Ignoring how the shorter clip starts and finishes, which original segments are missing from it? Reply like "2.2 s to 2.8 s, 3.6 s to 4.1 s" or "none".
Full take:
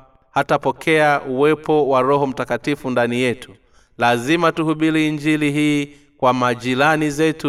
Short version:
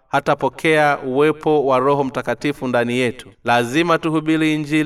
3.6 s to 3.9 s